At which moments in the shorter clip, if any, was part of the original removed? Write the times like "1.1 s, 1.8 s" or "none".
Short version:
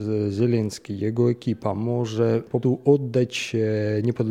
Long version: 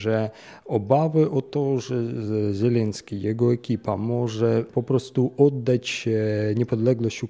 2.6 s